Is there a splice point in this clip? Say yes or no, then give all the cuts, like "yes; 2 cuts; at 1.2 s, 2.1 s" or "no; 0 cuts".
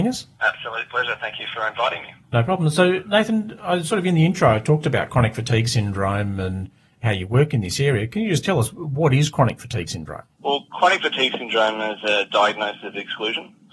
no; 0 cuts